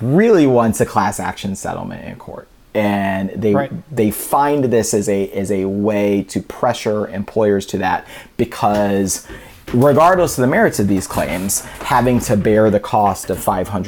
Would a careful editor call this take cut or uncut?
uncut